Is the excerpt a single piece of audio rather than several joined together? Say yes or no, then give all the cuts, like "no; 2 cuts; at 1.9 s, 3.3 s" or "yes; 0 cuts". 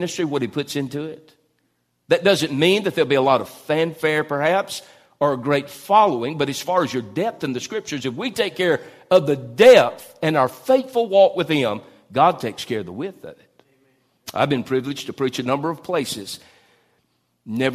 yes; 0 cuts